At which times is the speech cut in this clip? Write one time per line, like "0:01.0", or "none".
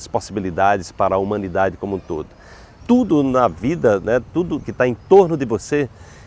0:02.8
0:04.6